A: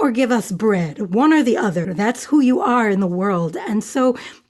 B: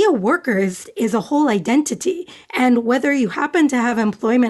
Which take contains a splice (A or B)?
A